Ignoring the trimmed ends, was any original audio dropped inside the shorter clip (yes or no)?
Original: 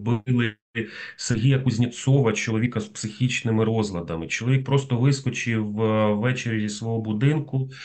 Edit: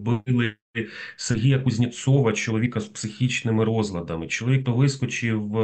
yes